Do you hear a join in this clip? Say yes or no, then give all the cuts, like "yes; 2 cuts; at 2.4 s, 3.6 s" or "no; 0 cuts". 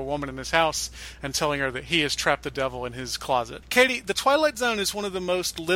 yes; 1 cut; at 3.6 s